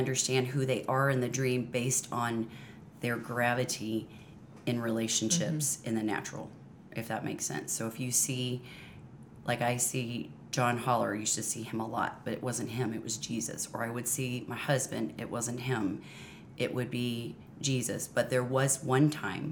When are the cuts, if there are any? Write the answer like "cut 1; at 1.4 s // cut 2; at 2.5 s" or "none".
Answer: none